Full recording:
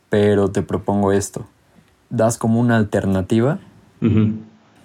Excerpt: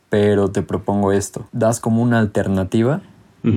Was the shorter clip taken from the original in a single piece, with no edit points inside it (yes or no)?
no